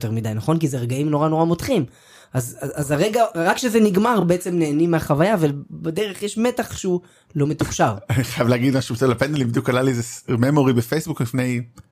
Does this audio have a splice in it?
no; 0 cuts

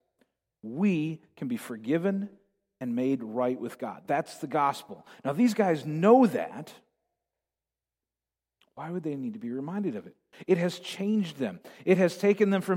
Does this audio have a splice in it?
no; 0 cuts

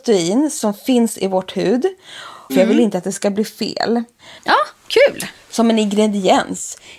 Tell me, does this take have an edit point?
yes; 2 cuts; at 2.5 s, 4.4 s

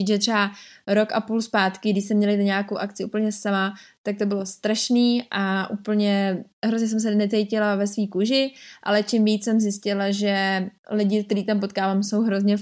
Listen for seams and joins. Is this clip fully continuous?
no; 1 cut; at 10.8 s

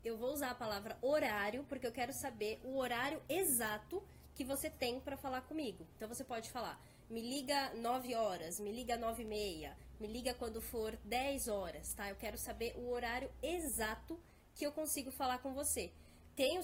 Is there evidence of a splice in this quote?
no; 0 cuts

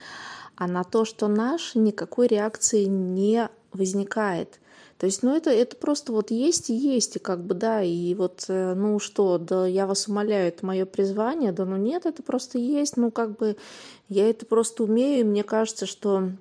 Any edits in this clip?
no; 0 cuts

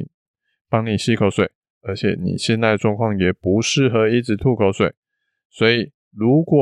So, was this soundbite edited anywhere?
no; 0 cuts

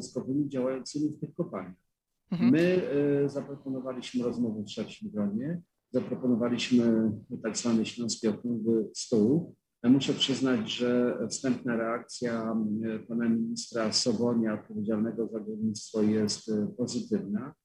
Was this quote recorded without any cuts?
yes; 0 cuts

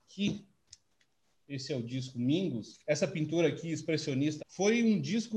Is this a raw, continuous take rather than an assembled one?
no; 1 cut; at 4.4 s

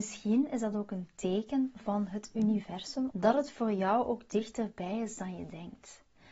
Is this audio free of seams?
no; 1 cut; at 3.1 s

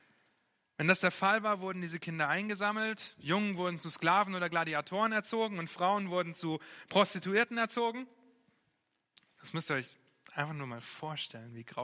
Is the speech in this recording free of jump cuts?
yes; 0 cuts

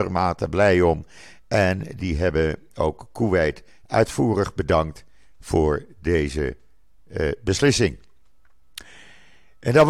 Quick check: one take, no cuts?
yes; 0 cuts

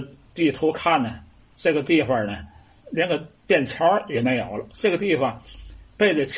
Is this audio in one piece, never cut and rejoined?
no; 1 cut; at 4.7 s

